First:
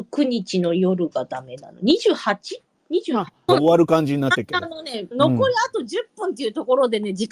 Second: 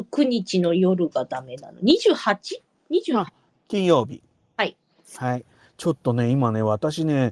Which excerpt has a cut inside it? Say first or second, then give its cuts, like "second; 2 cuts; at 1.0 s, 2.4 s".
first; 2 cuts; at 3.5 s, 5.1 s